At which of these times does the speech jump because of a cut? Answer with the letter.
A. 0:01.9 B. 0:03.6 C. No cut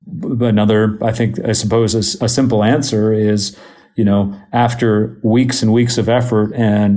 C